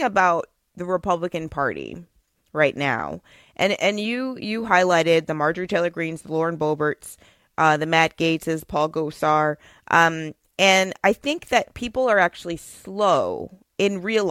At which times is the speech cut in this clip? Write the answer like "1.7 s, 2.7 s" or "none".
none